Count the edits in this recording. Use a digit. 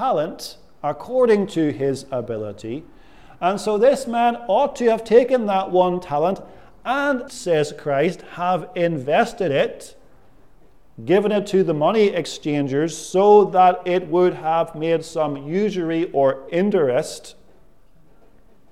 1